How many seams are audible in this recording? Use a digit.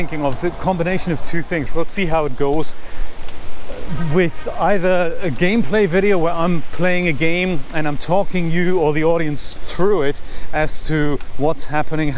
1